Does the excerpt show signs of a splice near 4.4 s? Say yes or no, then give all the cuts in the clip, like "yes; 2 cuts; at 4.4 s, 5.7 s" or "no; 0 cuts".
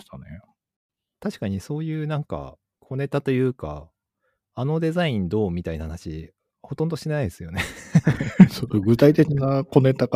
no; 0 cuts